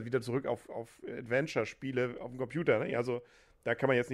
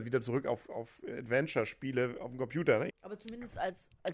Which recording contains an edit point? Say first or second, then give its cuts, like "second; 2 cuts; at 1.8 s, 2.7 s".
second; 1 cut; at 2.9 s